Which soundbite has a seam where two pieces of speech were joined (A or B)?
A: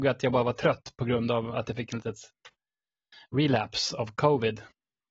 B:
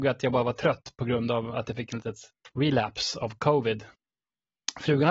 B